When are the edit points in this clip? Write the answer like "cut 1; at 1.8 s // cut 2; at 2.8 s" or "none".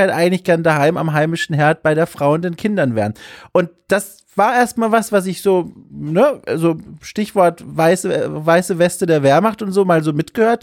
none